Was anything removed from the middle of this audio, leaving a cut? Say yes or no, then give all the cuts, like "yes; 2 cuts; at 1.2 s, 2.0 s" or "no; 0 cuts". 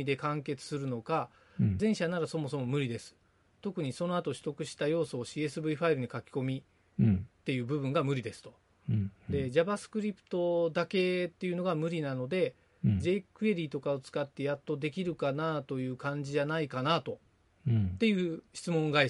yes; 1 cut; at 1.8 s